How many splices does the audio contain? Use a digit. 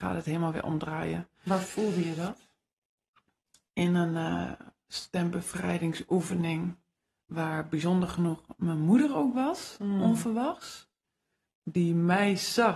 0